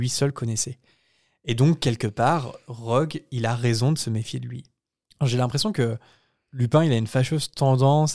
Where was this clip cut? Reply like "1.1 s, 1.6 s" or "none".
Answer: none

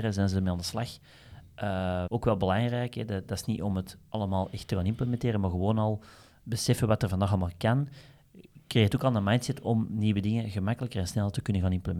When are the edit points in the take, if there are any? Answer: 2.1 s

